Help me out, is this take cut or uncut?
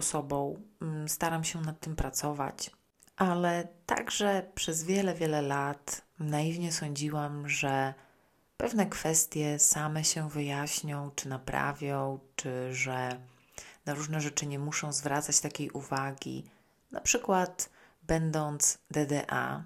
uncut